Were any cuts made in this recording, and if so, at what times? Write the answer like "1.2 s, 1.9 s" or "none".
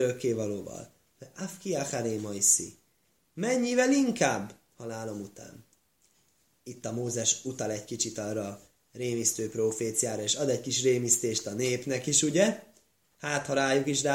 none